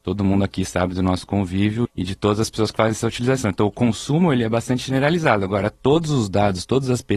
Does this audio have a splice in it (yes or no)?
yes